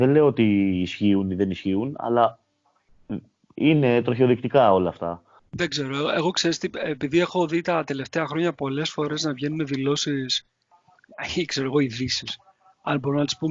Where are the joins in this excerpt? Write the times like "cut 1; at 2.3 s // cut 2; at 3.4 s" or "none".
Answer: cut 1; at 5.4 s